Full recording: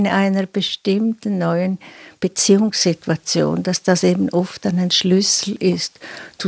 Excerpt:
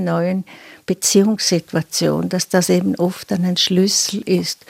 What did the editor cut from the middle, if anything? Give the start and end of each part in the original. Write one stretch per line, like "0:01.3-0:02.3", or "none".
none